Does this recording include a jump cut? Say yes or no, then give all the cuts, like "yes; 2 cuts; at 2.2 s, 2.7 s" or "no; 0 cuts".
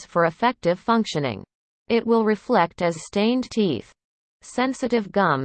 yes; 1 cut; at 4.3 s